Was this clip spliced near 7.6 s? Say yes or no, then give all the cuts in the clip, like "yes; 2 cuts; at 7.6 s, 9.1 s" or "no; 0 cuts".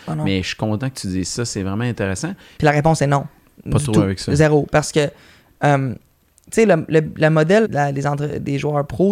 yes; 2 cuts; at 2.6 s, 7.6 s